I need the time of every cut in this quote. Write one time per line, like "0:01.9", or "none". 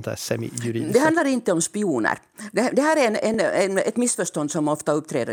none